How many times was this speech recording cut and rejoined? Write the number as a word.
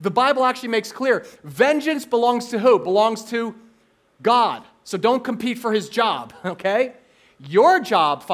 zero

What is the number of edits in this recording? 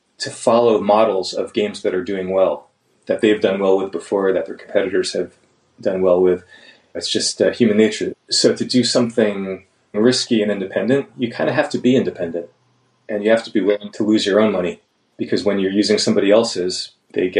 one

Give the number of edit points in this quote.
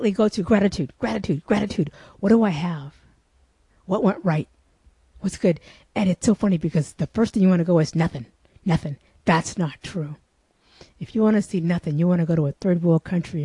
zero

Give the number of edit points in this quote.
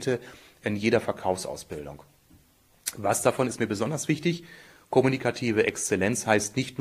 zero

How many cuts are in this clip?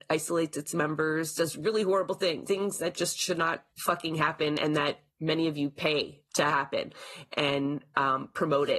three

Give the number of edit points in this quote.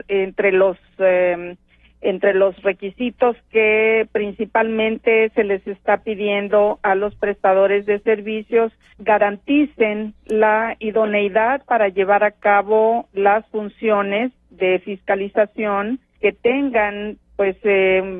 two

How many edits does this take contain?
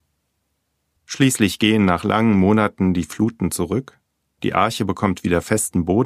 one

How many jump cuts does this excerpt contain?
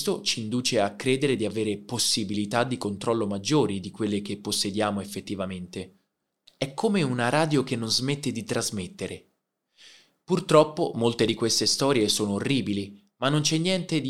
one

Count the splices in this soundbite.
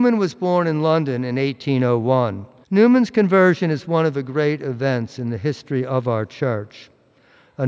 one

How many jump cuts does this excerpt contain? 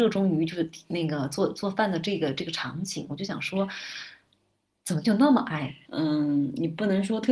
one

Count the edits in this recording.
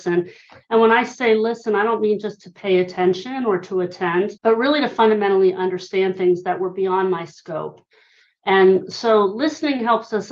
one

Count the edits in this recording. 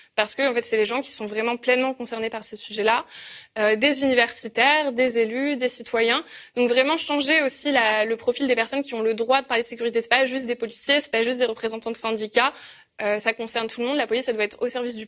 zero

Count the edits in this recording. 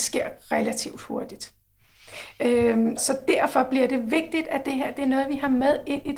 one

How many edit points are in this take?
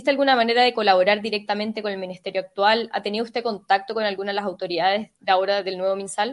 one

